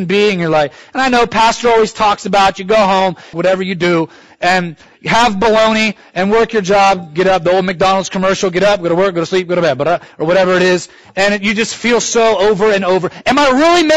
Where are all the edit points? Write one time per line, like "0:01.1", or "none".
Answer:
0:03.3